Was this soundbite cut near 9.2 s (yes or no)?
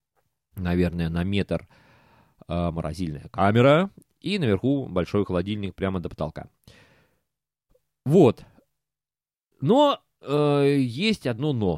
no